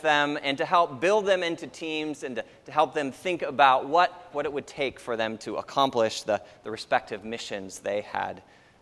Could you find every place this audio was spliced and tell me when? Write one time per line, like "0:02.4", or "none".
0:04.3